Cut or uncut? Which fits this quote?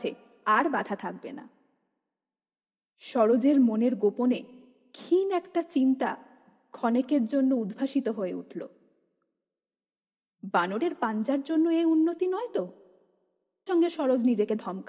cut